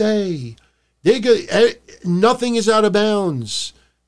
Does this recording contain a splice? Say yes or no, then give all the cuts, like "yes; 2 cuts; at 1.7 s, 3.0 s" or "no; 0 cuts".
no; 0 cuts